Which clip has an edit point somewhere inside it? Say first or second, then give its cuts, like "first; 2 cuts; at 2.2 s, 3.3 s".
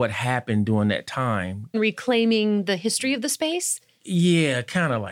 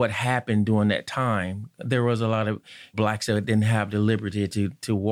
first; 1 cut; at 1.7 s